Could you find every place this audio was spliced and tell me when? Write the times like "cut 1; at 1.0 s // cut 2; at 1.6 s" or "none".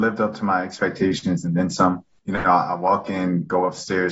none